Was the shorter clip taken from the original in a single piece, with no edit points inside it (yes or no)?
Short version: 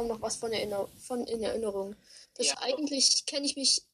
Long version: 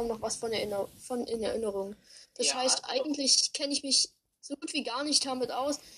no